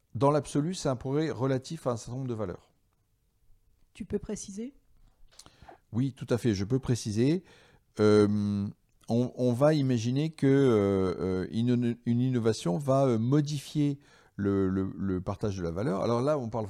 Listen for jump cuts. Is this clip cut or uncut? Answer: uncut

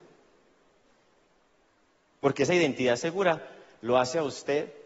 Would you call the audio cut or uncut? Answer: uncut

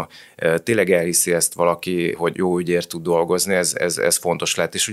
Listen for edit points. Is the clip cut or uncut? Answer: cut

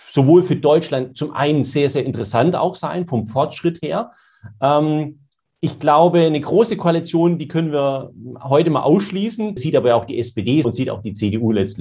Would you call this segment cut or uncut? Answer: cut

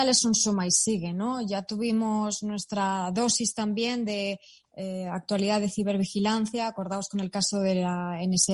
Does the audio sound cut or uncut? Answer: uncut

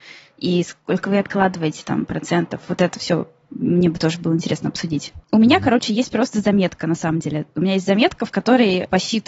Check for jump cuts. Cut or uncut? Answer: cut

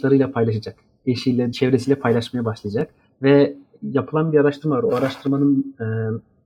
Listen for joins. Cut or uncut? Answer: cut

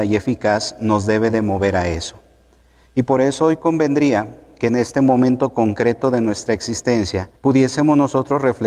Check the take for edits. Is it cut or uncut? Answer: cut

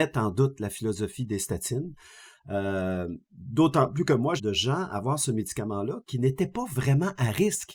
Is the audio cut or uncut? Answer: cut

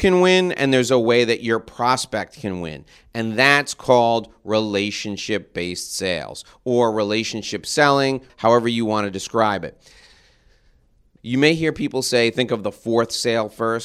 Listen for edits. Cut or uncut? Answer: cut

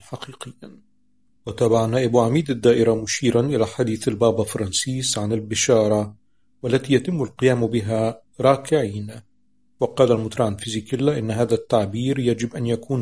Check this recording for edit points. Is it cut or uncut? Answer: uncut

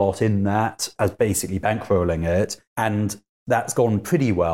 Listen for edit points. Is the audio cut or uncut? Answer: cut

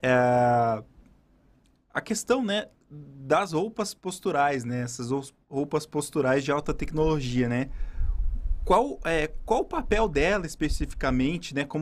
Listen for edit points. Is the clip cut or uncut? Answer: uncut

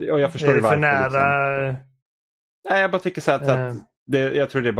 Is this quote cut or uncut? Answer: uncut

